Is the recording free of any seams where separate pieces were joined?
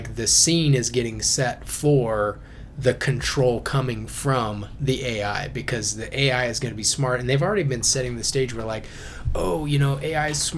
yes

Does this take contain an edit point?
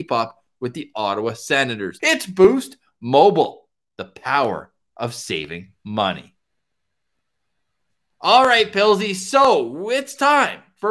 yes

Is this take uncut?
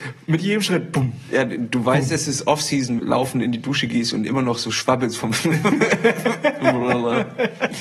no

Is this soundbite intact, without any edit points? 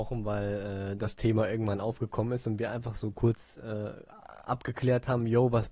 yes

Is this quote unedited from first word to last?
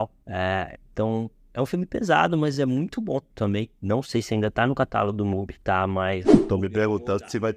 yes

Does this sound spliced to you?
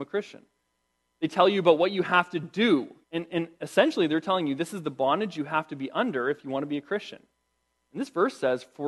yes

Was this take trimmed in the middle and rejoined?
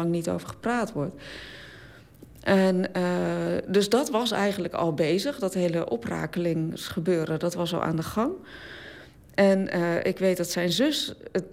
no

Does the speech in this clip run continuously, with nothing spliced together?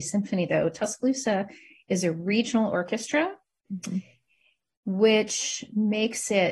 yes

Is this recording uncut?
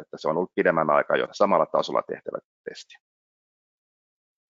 no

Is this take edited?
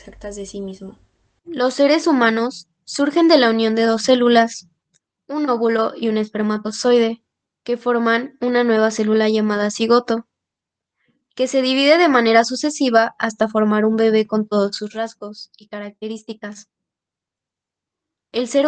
yes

